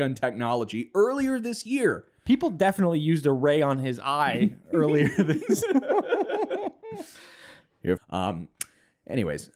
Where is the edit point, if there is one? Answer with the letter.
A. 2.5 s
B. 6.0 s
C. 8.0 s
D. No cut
C